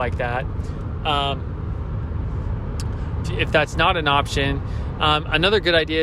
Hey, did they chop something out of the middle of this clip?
yes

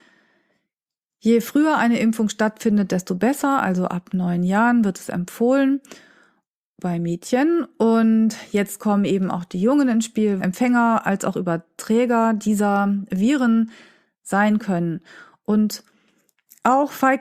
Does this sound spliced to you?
yes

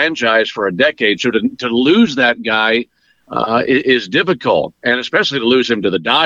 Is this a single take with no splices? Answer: yes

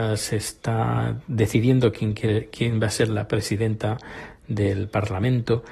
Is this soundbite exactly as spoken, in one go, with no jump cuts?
yes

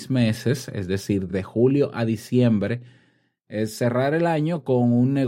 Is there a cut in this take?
no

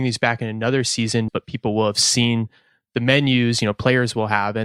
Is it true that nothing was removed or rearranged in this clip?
no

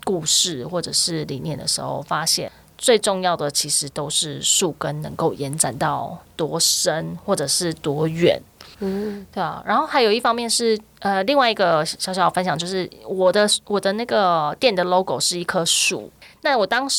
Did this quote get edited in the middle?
yes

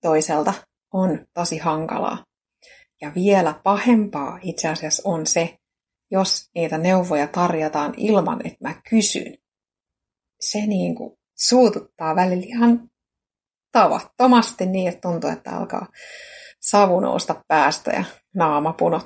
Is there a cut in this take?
no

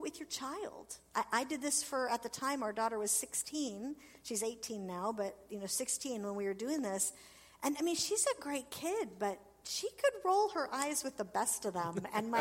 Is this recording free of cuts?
yes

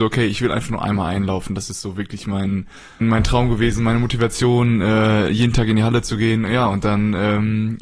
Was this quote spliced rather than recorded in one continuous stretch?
yes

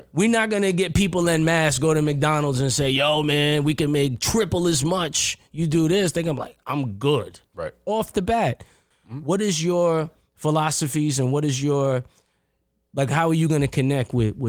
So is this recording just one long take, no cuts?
no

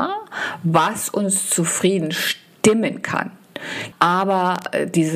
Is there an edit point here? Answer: yes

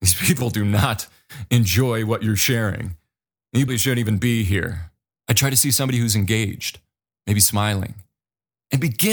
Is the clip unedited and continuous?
no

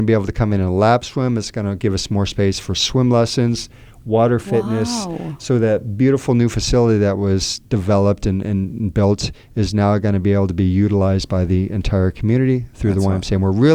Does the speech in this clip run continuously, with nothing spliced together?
yes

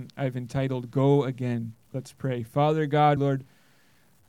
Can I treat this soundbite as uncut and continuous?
no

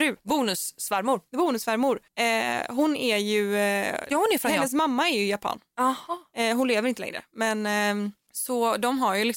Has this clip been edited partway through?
no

